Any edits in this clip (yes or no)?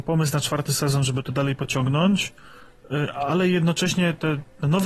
no